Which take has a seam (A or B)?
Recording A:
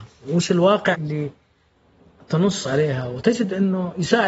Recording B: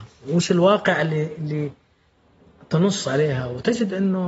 A